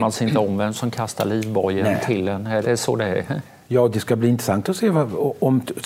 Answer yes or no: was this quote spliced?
yes